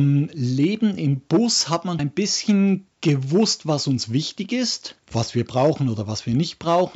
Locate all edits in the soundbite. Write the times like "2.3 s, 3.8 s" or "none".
2.0 s